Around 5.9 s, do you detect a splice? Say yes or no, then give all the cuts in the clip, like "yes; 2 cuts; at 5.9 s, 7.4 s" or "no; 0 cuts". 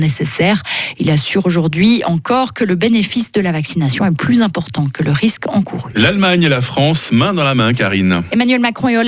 no; 0 cuts